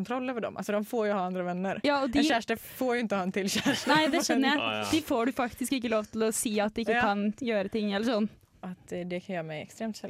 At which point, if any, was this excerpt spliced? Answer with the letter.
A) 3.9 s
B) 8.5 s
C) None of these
B